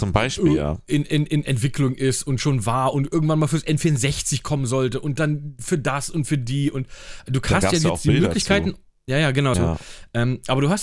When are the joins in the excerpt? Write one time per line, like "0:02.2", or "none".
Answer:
0:09.5